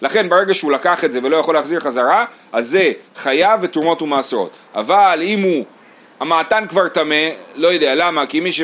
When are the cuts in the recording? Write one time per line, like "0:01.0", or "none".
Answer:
none